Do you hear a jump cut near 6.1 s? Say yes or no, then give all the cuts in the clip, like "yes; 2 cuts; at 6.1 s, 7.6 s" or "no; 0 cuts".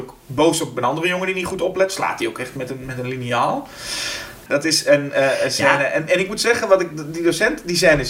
no; 1 cut; at 4.5 s